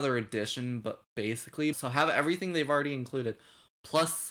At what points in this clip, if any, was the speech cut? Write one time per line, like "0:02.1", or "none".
0:01.7